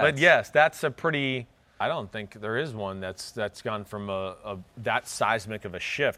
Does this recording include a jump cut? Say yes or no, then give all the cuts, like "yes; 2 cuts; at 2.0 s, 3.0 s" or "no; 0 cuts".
yes; 1 cut; at 1.8 s